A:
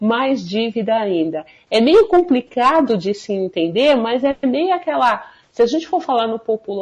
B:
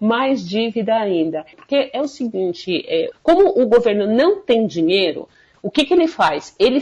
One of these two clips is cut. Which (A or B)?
B